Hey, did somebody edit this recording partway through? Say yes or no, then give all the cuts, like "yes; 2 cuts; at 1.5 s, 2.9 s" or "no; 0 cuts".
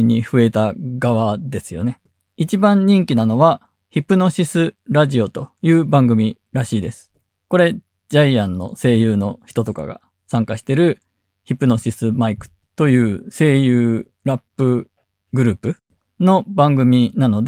no; 0 cuts